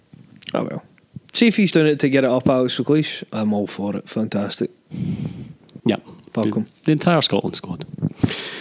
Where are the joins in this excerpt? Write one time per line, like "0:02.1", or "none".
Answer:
0:01.7
0:05.8

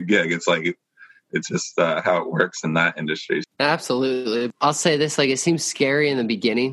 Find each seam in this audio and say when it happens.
0:03.4
0:04.5

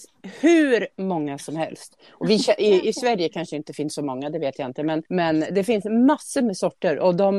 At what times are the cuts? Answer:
0:05.1

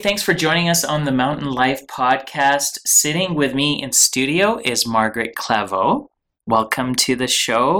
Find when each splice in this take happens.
none

